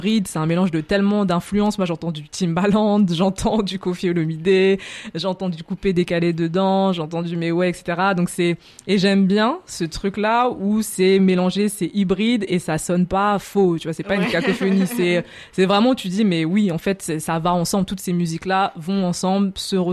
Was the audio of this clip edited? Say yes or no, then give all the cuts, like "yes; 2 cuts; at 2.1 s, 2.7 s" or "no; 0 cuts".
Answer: no; 0 cuts